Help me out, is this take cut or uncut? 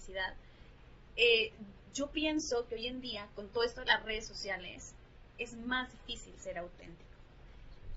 cut